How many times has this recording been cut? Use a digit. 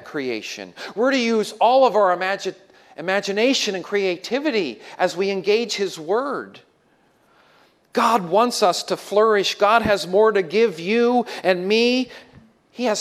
0